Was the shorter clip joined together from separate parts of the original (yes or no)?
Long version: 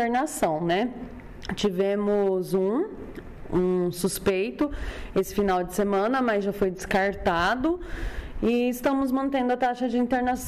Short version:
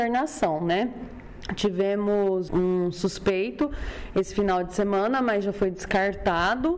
yes